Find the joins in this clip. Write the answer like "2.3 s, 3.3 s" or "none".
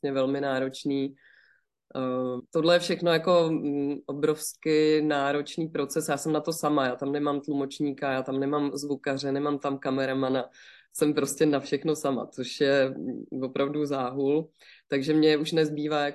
2.4 s